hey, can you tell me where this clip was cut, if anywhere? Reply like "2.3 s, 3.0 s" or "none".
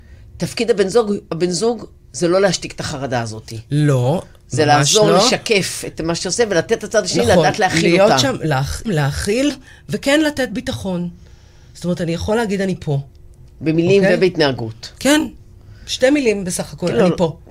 8.8 s